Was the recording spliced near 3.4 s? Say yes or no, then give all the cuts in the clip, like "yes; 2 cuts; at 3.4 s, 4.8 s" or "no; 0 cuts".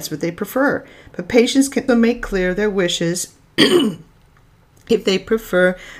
no; 1 cut; at 1.9 s